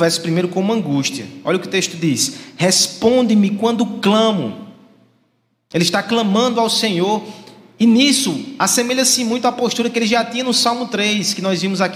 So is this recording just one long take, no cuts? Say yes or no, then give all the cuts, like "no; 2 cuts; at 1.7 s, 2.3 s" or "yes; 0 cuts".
yes; 0 cuts